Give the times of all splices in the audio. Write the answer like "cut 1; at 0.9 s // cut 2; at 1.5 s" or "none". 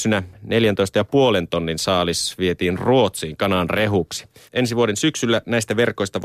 cut 1; at 4.5 s